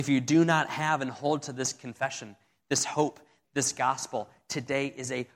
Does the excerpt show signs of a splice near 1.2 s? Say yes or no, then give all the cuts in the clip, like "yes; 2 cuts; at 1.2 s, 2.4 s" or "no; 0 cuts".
no; 1 cut; at 3.4 s